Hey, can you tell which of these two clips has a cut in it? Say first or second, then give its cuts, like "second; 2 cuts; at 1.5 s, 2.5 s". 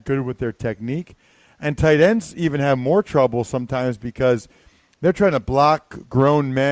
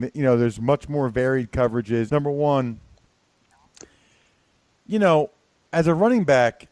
second; 1 cut; at 2.1 s